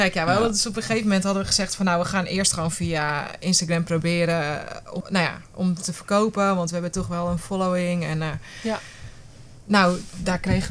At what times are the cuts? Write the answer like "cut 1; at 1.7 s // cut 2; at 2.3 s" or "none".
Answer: cut 1; at 5.0 s